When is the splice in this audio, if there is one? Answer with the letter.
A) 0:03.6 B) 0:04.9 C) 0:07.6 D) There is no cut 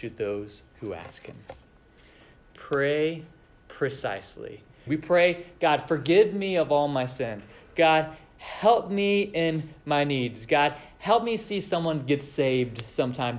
B